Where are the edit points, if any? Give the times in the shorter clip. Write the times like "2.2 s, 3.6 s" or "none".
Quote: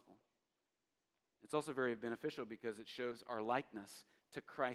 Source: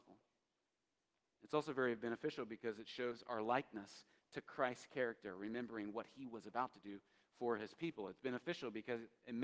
none